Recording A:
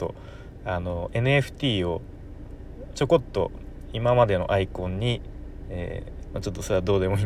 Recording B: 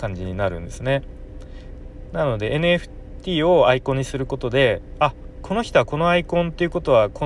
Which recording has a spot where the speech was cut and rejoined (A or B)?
A